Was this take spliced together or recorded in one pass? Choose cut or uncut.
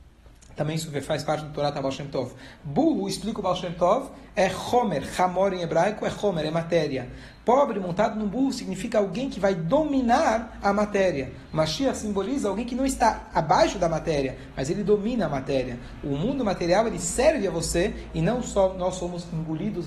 uncut